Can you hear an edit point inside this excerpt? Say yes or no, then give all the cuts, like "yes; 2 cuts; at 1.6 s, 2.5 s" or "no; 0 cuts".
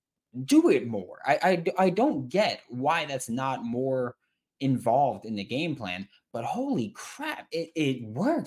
no; 0 cuts